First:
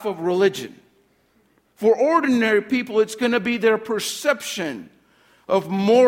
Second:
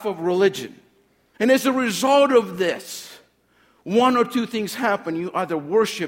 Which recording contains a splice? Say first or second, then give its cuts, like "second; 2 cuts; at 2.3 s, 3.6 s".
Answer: second; 1 cut; at 1.3 s